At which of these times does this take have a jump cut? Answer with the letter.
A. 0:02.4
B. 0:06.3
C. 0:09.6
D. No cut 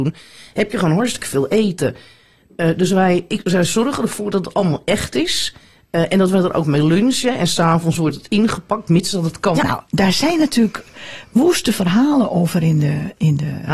C